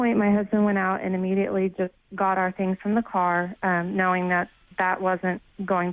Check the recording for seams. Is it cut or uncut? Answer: uncut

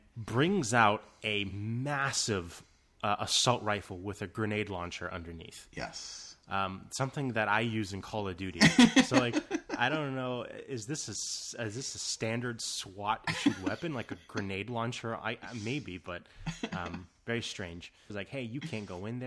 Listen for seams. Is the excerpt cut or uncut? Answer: cut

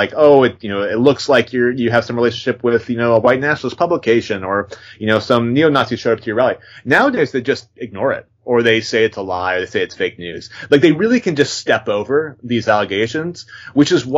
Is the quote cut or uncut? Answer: uncut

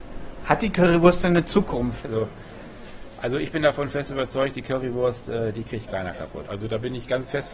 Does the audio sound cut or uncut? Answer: cut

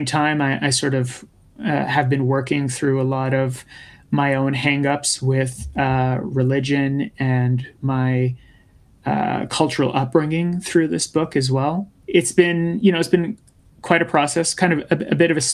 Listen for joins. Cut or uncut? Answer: uncut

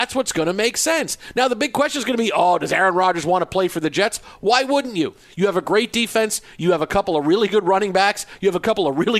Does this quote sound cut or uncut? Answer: uncut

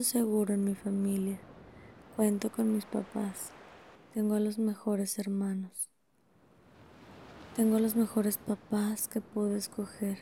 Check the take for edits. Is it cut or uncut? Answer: cut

